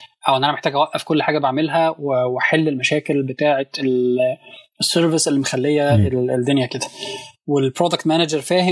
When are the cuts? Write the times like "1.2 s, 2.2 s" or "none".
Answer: none